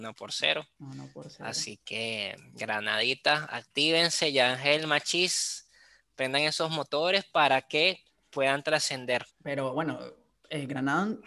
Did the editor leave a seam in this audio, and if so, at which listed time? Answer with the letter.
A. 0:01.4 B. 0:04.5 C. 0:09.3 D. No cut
C